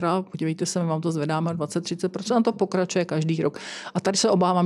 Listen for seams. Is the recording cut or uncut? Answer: uncut